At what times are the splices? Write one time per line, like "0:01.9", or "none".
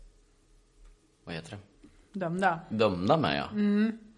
none